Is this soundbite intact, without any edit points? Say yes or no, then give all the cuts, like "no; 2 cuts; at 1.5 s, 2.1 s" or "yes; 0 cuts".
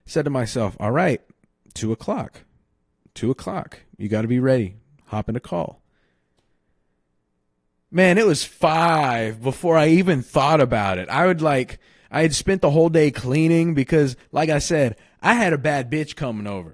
yes; 0 cuts